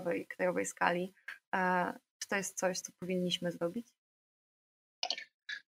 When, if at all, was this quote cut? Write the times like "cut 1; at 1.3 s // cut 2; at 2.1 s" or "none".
cut 1; at 2.8 s